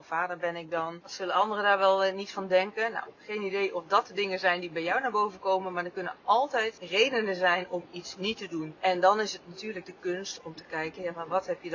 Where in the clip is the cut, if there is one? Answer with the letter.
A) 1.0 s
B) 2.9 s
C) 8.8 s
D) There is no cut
A